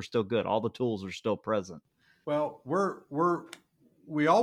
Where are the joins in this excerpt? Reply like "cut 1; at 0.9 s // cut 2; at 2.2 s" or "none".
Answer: none